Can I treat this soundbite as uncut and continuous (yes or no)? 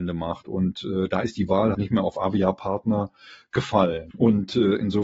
no